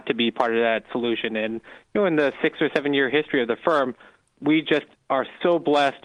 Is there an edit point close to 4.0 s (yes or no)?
no